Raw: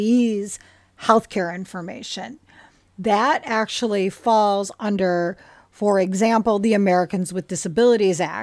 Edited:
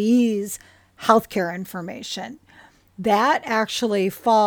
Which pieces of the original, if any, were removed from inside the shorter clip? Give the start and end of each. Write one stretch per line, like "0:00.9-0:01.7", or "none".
none